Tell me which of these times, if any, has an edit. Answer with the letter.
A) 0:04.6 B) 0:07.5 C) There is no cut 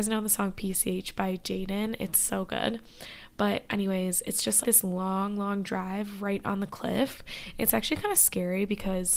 A